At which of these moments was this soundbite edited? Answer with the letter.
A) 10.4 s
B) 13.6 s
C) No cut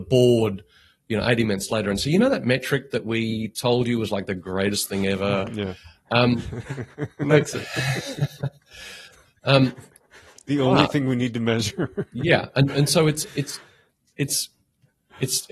C